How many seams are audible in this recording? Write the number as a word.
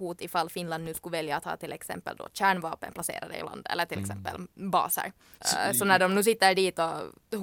one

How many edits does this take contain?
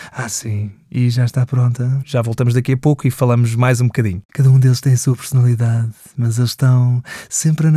two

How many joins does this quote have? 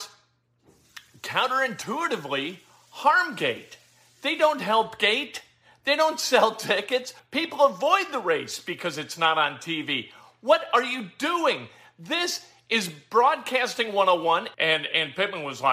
two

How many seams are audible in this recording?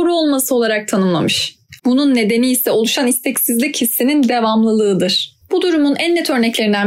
two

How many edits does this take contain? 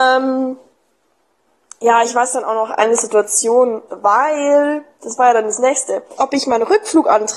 two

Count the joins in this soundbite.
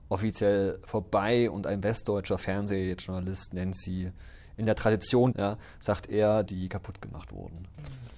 two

